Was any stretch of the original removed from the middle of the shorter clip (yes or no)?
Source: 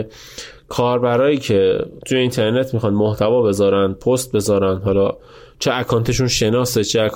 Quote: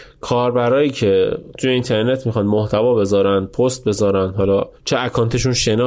yes